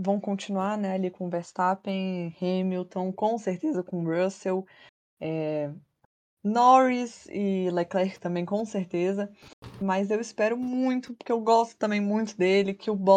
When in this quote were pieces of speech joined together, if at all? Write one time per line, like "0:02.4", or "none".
none